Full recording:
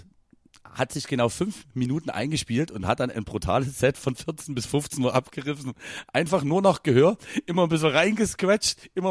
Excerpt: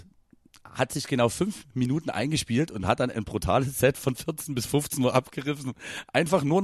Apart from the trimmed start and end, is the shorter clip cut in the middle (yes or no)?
no